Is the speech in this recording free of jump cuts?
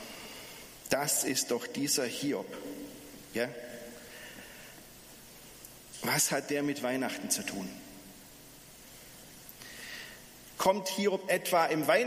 yes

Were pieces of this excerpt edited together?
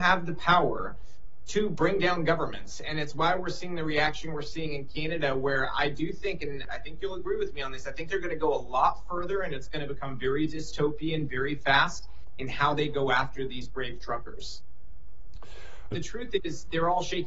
yes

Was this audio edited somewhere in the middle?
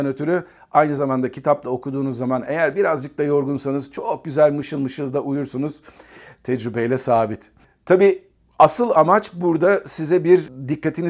no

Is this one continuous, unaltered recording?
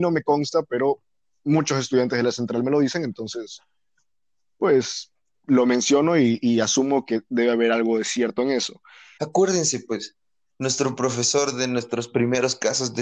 no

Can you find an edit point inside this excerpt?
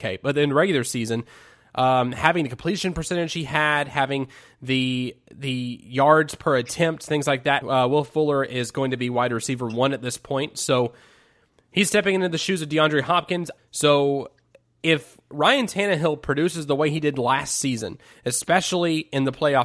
yes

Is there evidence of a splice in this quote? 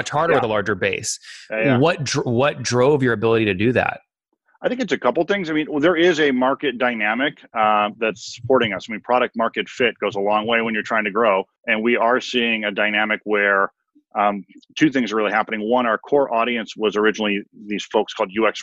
yes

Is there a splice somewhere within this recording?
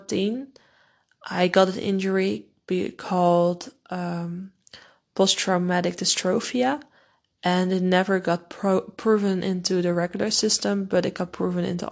no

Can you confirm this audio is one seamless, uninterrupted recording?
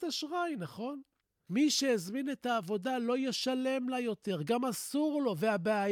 no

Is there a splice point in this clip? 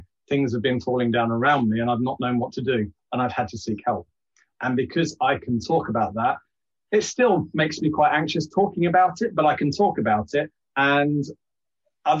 no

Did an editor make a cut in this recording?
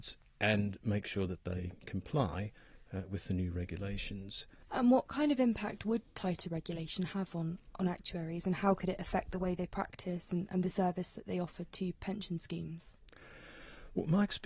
yes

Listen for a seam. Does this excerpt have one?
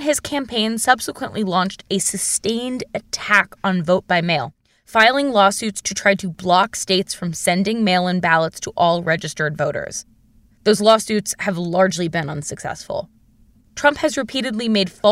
no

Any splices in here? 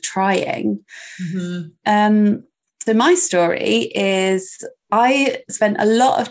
yes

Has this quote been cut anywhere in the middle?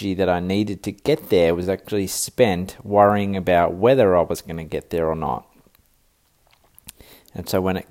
no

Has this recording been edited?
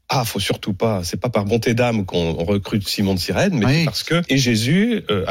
yes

